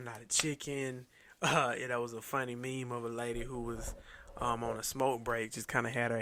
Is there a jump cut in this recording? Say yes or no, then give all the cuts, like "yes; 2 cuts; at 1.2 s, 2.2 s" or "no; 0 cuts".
no; 0 cuts